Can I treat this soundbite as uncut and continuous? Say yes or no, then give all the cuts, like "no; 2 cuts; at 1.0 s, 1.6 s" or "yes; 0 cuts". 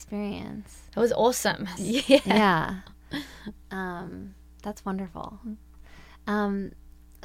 no; 1 cut; at 1.8 s